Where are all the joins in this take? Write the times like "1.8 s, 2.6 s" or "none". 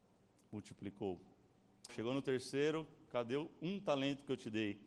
1.9 s